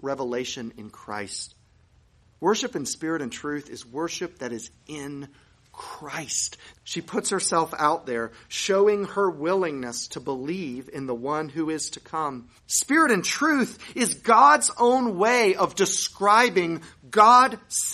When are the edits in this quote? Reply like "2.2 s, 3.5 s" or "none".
6.7 s, 12.6 s